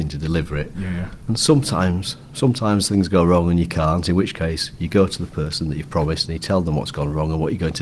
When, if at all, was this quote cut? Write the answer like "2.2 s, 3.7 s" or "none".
none

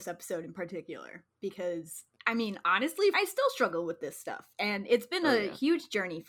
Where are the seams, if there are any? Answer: 3.1 s

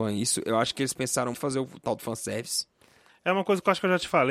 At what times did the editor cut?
1.3 s, 3.1 s

